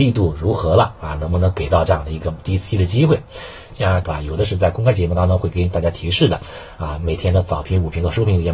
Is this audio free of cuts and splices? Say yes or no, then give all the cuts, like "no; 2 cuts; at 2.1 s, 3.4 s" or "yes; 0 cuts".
no; 1 cut; at 4.0 s